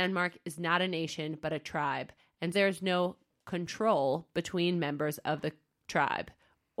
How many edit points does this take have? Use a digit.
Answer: 1